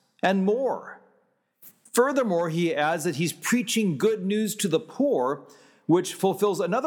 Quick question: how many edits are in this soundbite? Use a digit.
1